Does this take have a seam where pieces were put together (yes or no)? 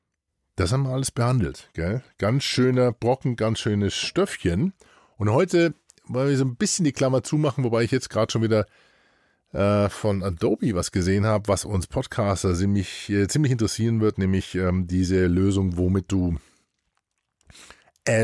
no